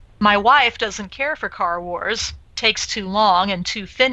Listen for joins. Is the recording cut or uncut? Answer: cut